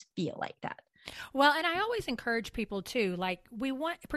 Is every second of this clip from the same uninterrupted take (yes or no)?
yes